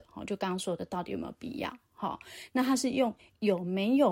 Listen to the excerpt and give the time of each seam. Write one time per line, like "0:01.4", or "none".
none